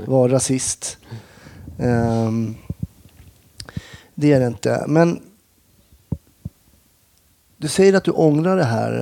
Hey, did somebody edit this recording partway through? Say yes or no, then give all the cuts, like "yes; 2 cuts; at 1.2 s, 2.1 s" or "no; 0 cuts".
no; 0 cuts